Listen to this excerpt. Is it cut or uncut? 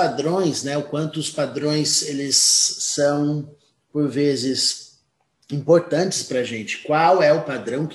uncut